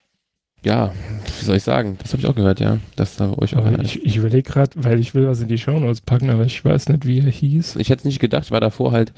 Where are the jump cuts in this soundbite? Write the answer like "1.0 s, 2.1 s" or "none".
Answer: 2.0 s, 7.7 s